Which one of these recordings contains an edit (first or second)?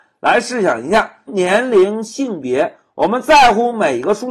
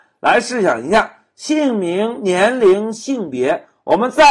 first